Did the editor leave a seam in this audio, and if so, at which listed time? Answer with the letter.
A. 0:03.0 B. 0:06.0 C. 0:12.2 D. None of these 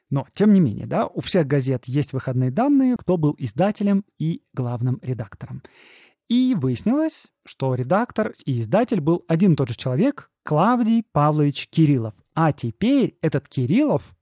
A